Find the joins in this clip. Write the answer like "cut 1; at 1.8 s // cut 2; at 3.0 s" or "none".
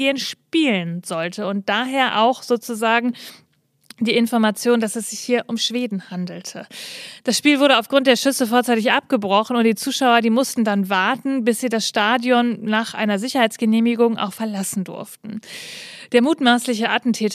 none